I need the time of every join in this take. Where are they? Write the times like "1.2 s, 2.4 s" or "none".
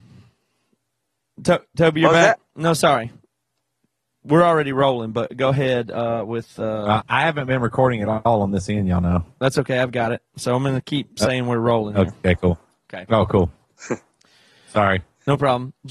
7.0 s